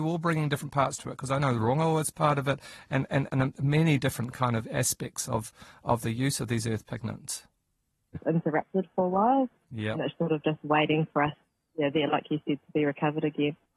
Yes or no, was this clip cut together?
yes